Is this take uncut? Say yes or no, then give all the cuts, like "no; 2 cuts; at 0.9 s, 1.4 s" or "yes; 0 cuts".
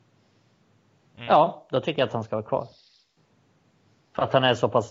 yes; 0 cuts